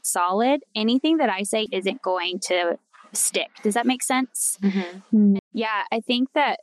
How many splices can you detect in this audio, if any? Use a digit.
2